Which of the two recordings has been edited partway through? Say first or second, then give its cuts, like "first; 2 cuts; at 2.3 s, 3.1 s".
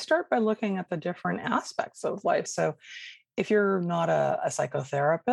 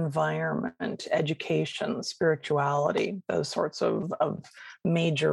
first; 1 cut; at 2.5 s